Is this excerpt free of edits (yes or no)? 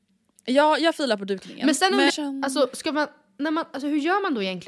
no